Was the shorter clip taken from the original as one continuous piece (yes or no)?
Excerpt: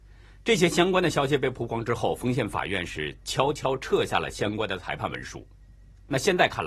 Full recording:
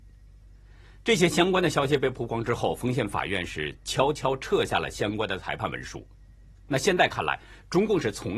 yes